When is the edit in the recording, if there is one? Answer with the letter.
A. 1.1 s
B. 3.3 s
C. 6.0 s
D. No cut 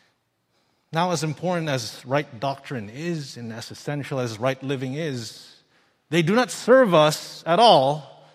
D